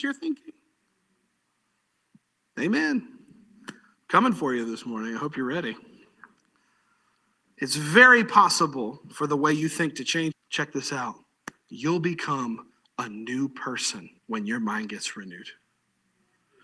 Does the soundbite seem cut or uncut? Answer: cut